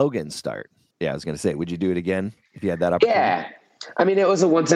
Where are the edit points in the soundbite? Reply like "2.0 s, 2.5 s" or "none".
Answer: 0.9 s